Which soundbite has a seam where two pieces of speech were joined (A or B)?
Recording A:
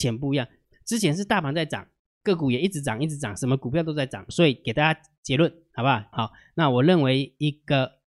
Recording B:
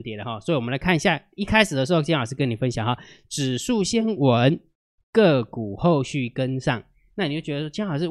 A